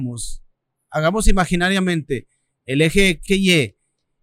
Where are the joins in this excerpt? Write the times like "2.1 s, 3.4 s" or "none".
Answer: 3.3 s